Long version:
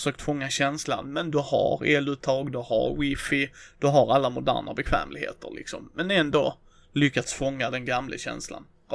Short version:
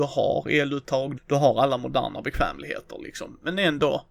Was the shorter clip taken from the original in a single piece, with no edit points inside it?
no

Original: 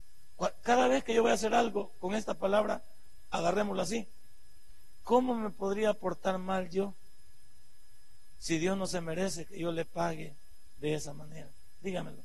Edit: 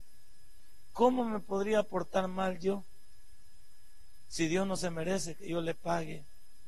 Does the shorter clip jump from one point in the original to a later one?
no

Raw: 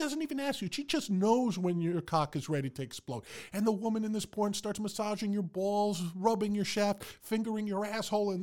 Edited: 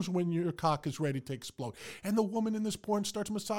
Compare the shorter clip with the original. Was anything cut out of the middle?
no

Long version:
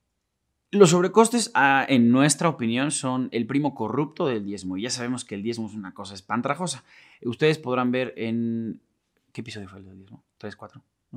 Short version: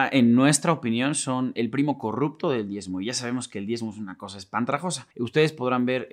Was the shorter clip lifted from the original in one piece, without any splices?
no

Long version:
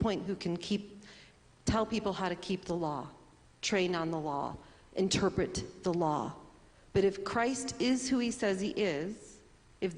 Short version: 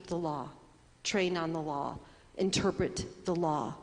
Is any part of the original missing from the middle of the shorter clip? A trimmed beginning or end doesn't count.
no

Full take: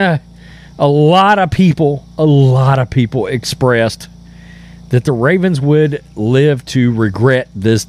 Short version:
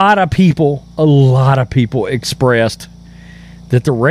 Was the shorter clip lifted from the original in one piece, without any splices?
yes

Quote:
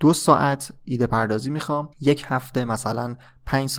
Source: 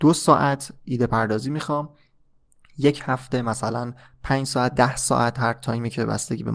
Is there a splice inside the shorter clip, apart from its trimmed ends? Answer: yes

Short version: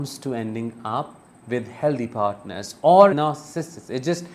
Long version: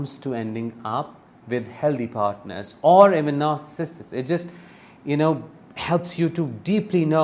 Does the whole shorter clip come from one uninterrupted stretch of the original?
no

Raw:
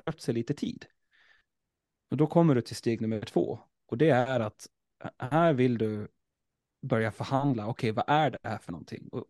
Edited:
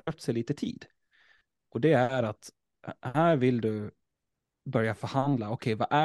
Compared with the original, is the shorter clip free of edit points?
no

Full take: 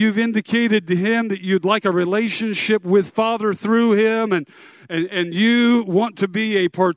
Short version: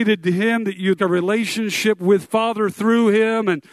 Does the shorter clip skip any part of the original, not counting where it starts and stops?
yes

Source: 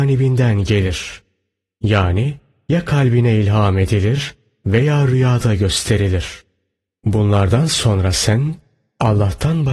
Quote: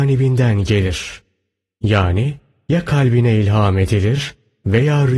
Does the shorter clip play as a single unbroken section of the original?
yes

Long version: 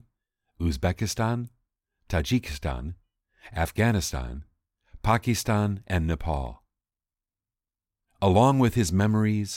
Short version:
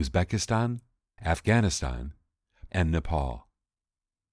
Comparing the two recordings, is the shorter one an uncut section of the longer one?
no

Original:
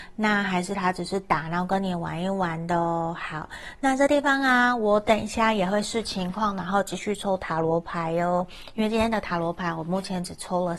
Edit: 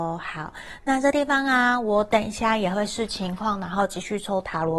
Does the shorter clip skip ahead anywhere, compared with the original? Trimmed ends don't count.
no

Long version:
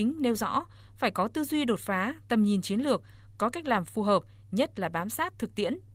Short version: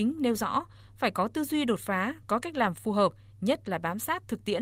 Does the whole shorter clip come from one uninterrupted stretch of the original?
no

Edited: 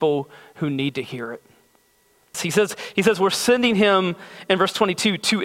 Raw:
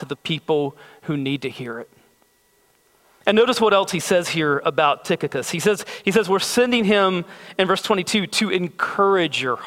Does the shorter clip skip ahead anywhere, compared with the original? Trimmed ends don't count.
yes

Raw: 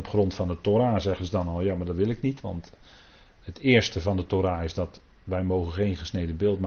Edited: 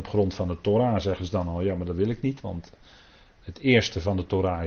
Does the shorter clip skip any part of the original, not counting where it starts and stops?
no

